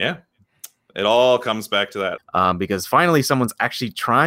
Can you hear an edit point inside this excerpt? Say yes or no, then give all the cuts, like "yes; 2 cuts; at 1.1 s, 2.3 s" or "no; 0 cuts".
yes; 1 cut; at 2.2 s